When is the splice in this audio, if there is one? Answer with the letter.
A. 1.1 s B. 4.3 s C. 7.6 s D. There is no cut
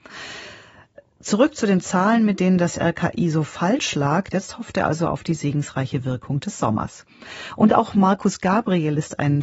B